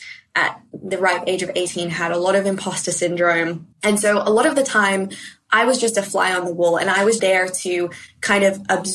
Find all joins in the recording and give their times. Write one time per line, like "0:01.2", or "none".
0:03.7
0:07.2